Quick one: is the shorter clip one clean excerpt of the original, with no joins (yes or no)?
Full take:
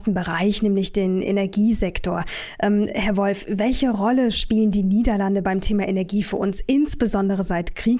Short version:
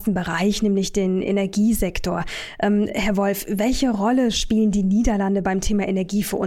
yes